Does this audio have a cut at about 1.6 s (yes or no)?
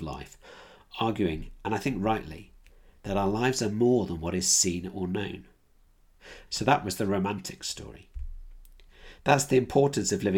no